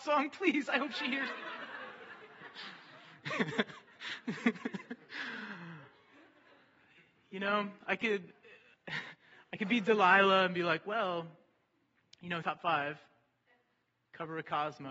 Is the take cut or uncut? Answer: cut